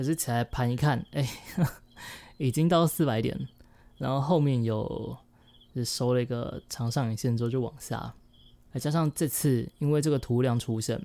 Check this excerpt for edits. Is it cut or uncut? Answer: cut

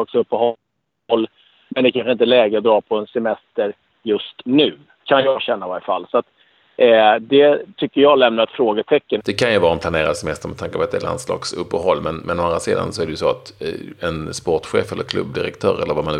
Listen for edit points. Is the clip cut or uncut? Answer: cut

